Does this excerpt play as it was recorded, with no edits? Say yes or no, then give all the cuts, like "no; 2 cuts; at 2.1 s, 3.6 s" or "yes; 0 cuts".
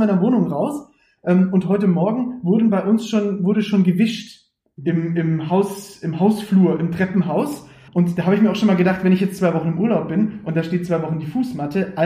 no; 1 cut; at 7.9 s